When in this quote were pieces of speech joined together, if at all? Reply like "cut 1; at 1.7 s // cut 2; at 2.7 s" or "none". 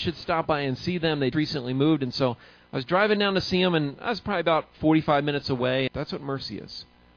cut 1; at 1.3 s // cut 2; at 5.9 s